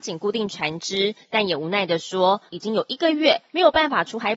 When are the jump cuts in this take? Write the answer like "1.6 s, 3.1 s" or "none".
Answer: 2.5 s

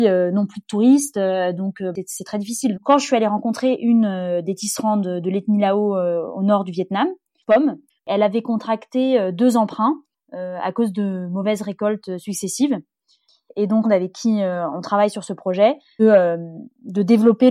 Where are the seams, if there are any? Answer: 2.7 s, 13.8 s, 16.0 s

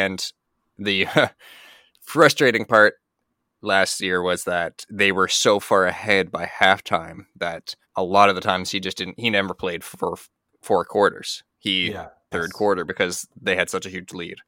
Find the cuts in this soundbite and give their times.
7.8 s, 12.3 s

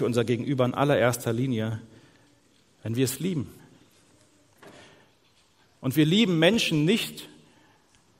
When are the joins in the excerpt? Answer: none

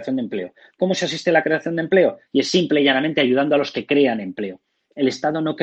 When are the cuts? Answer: 2.3 s

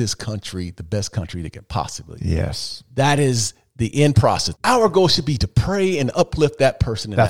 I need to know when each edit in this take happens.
4.5 s

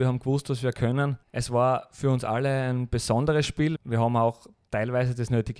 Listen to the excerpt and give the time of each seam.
1.2 s, 3.8 s

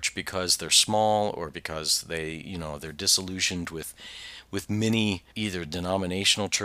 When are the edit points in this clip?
5.3 s

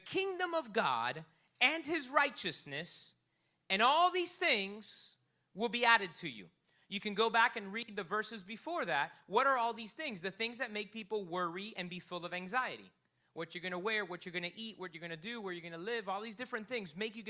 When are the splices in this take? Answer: none

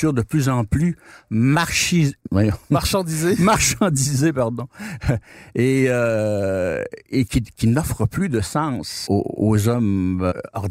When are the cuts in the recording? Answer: 7.3 s, 9.1 s

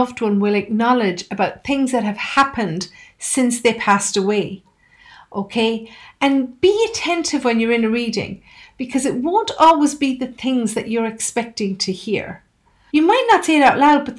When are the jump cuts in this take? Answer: 12.9 s

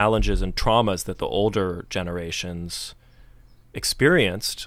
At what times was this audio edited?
none

